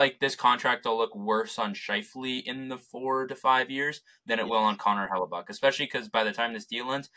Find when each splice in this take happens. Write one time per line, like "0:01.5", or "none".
none

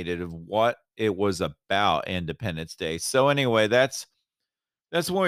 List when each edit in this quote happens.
none

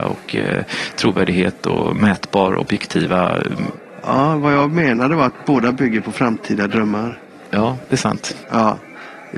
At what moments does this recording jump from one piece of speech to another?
0:08.4

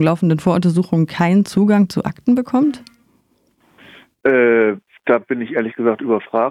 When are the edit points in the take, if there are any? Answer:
none

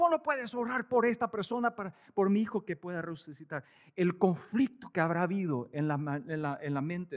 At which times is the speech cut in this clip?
none

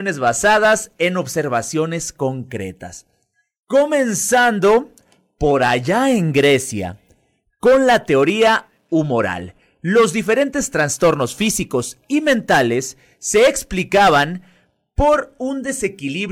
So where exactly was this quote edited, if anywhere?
none

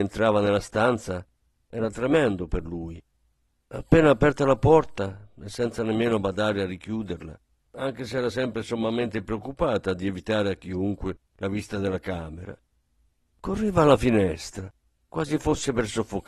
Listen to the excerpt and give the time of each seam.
0:15.0

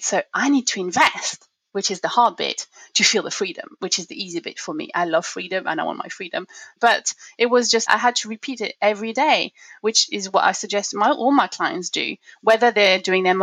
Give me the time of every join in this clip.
0:06.8
0:07.9

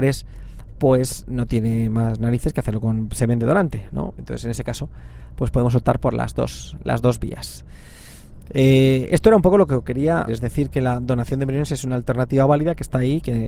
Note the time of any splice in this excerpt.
0:10.3

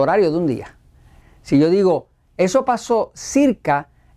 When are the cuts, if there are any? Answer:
0:01.2

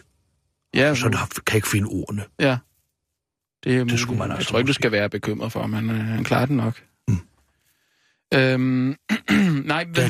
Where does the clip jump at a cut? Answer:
none

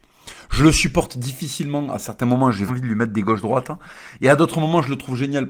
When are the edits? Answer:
0:02.7

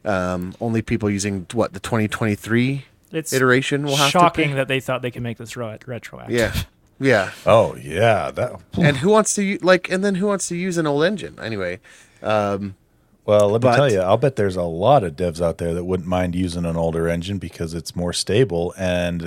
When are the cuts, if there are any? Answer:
none

